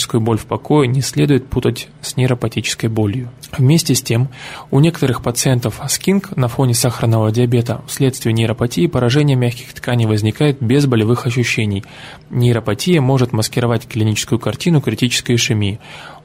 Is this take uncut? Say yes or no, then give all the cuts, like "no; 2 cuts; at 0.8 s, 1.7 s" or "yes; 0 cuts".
yes; 0 cuts